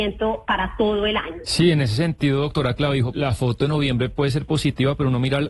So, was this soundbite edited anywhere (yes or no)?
yes